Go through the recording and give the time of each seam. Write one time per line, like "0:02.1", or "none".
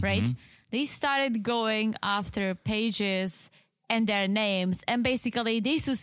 none